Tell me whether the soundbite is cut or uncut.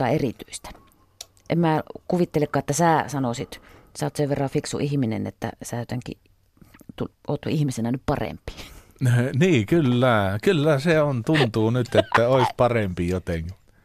uncut